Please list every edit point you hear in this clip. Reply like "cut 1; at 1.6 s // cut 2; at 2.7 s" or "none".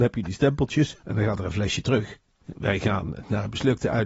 cut 1; at 1.0 s // cut 2; at 2.4 s